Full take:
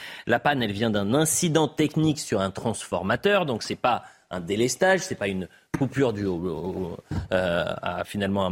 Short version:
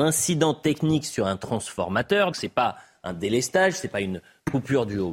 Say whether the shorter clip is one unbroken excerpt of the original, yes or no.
no